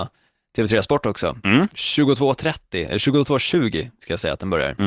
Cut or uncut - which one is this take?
uncut